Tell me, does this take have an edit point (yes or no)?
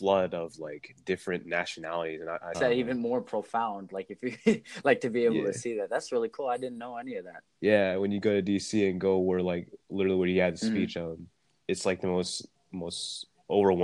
yes